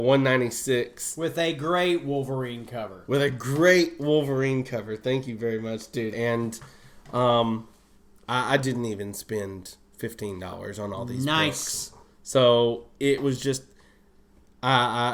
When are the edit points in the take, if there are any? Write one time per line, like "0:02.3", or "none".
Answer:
0:06.1